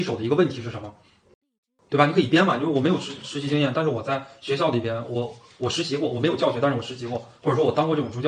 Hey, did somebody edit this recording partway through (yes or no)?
no